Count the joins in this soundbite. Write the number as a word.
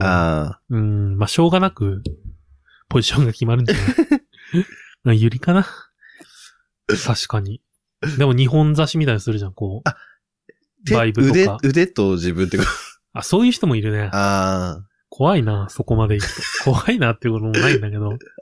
one